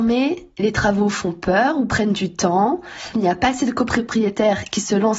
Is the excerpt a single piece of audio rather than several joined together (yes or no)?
no